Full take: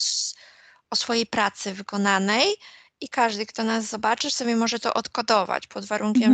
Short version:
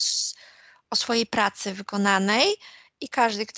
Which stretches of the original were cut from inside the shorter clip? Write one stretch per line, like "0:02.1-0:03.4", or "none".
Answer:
none